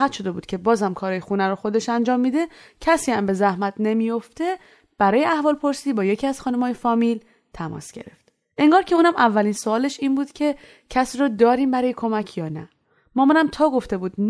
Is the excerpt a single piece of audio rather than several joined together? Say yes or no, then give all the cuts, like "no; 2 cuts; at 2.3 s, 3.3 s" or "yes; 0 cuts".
yes; 0 cuts